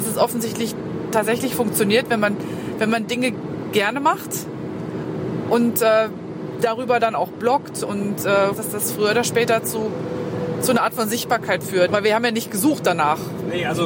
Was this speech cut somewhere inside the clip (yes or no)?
yes